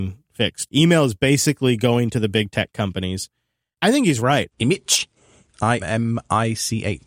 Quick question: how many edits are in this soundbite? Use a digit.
2